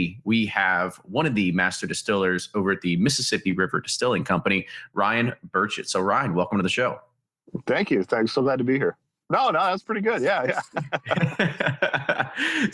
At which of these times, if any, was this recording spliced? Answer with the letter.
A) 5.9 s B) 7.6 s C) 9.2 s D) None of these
C